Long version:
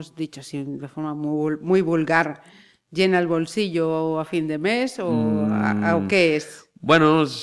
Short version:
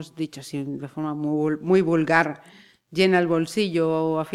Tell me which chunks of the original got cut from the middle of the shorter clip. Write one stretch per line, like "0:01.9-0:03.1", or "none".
none

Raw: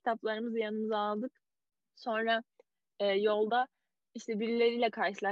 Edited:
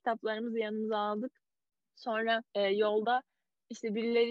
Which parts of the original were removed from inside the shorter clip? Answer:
0:02.5-0:02.9

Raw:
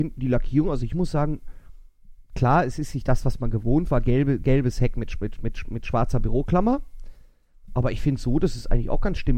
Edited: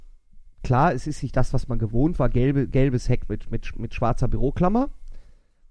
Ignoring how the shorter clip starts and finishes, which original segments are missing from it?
0:04.9-0:05.1

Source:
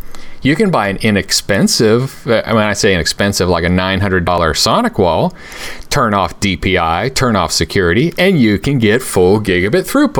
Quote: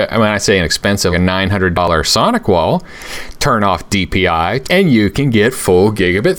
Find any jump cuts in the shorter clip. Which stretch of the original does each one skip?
0:03.5-0:03.6
0:07.1-0:08.1

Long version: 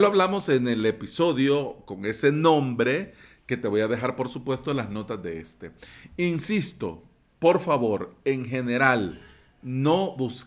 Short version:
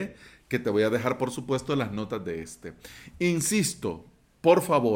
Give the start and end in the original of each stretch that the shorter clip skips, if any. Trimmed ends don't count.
none

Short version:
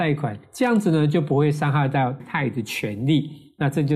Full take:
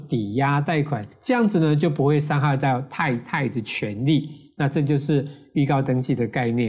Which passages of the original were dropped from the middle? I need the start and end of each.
0:02.9-0:03.2

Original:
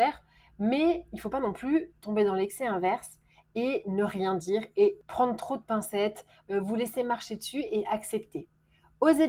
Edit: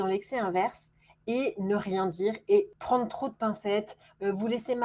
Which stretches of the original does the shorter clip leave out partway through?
none

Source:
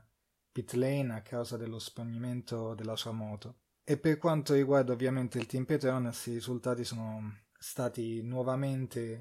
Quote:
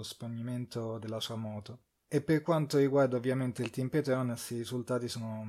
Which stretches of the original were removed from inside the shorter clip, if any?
none

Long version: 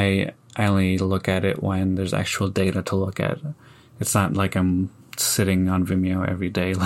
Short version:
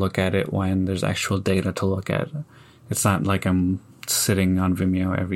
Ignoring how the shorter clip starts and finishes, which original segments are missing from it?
none

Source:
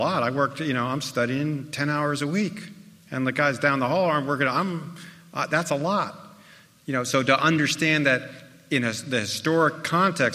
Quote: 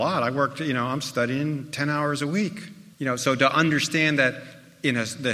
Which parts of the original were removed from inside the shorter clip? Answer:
0:02.9-0:06.8

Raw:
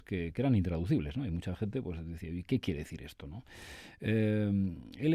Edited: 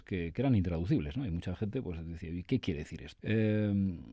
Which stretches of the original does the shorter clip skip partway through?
0:03.2-0:04.0

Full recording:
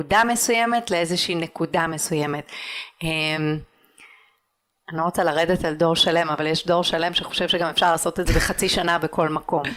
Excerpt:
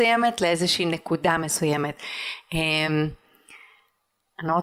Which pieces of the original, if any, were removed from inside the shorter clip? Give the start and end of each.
none

